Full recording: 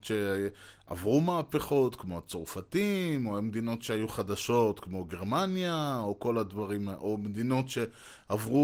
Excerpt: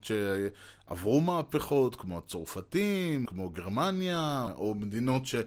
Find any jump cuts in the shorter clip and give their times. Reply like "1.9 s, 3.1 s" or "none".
3.3 s, 4.5 s